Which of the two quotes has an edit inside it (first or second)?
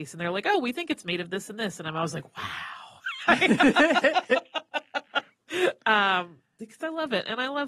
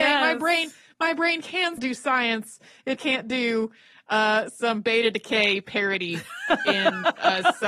second